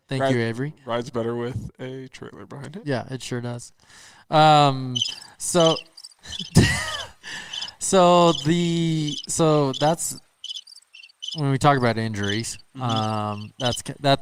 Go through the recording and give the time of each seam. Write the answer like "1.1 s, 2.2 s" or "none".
none